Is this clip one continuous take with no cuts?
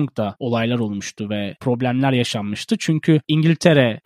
yes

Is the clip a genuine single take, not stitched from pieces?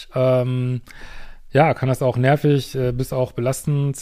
yes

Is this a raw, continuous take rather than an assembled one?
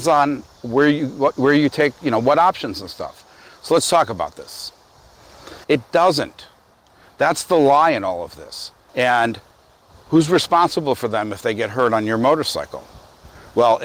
no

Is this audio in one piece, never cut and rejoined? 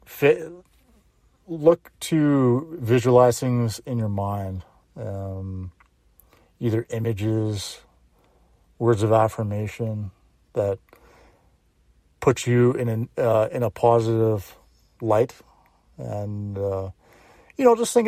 yes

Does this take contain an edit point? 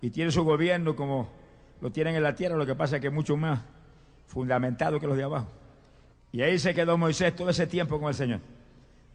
yes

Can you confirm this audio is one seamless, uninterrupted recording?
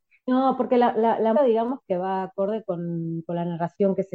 no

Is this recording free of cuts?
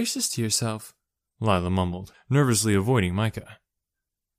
no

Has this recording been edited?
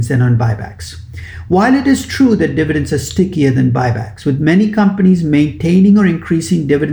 no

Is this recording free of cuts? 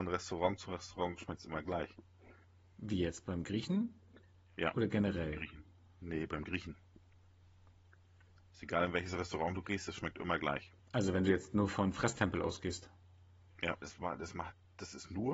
no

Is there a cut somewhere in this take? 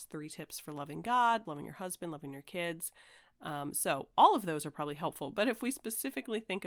yes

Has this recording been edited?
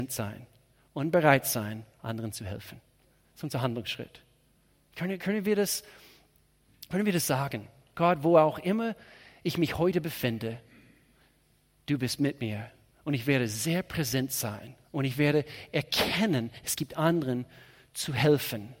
yes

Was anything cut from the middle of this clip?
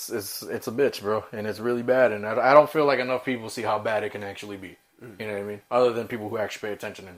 no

